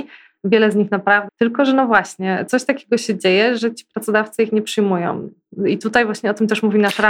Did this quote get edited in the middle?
yes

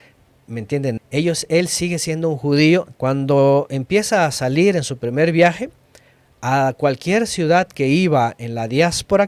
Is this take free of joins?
no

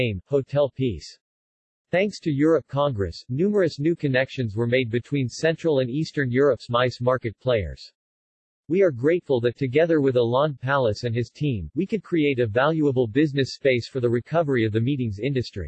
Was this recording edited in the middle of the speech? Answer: no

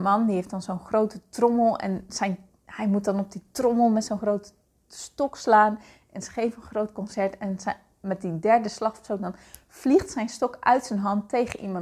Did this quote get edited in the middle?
no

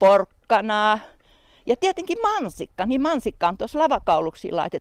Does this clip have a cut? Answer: no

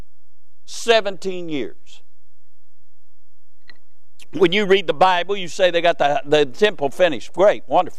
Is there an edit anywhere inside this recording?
no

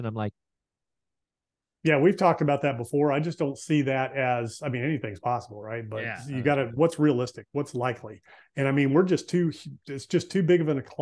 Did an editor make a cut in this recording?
no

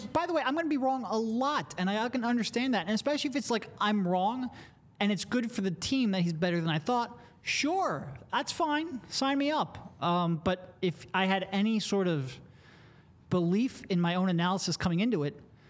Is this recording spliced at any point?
no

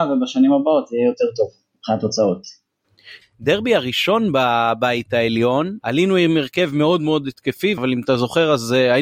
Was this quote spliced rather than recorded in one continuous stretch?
yes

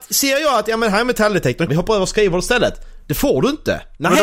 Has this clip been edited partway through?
yes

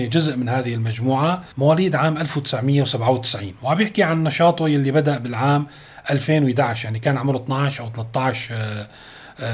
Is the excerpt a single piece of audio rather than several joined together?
no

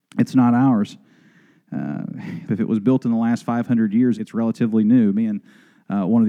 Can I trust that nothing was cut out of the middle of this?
no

